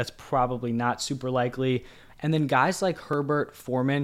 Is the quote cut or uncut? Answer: cut